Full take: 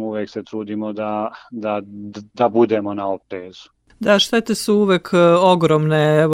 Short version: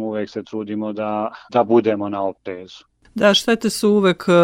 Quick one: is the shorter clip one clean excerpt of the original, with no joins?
no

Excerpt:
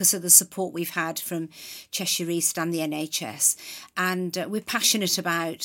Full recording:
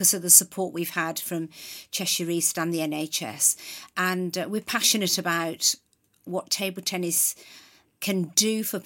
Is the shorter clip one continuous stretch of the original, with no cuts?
yes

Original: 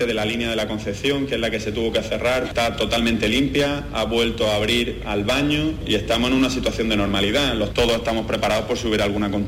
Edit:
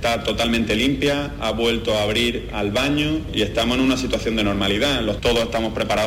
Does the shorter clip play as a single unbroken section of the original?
yes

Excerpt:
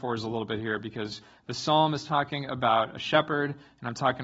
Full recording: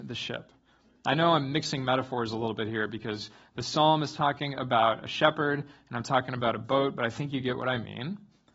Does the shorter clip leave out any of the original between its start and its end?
no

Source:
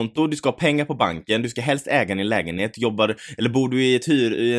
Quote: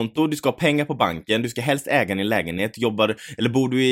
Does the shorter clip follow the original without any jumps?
yes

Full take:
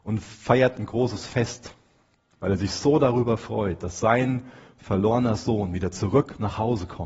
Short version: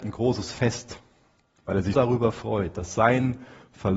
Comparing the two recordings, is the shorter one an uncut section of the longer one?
no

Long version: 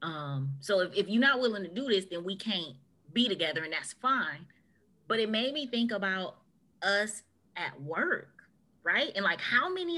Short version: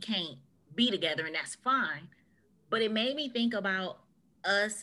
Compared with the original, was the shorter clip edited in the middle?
no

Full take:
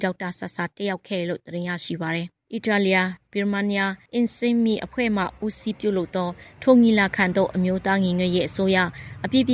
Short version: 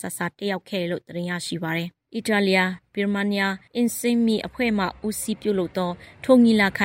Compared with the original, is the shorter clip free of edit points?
yes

